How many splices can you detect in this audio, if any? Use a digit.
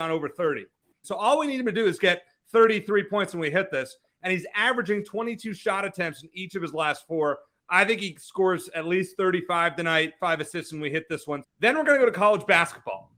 3